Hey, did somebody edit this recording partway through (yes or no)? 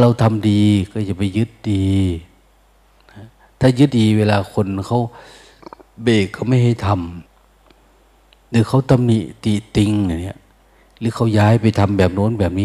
yes